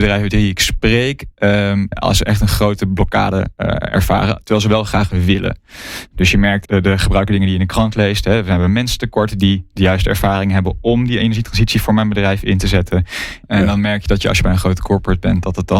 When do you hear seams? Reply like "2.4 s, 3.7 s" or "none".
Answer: 1.9 s, 6.7 s, 13.4 s